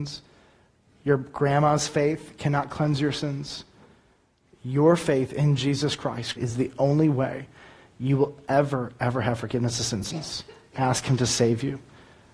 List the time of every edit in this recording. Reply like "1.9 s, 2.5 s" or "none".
6.4 s, 10.1 s